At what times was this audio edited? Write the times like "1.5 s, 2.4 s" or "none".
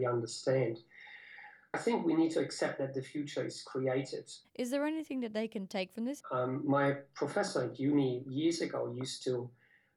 4.4 s, 6.2 s